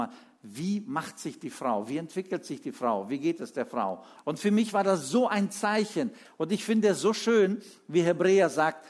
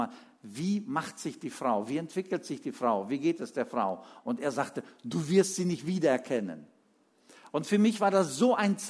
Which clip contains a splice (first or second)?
first